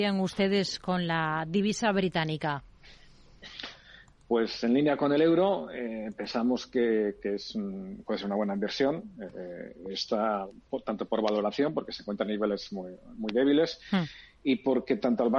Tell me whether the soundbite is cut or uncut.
uncut